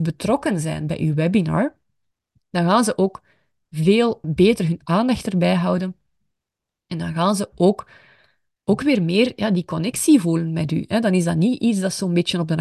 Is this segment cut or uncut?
cut